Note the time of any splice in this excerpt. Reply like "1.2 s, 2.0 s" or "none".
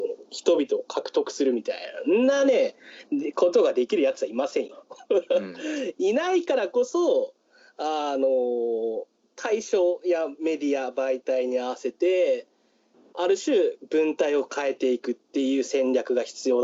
none